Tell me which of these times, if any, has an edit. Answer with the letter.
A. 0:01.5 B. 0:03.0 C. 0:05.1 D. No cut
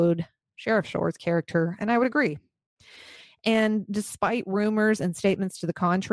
D